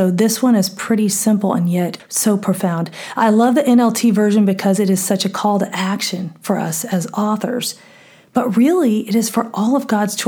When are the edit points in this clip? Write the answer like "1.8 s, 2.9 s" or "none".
none